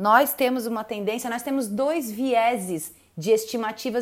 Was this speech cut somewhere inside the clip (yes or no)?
no